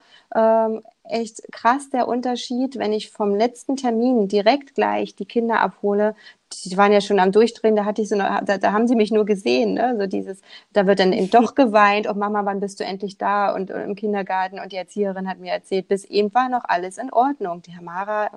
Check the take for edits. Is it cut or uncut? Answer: uncut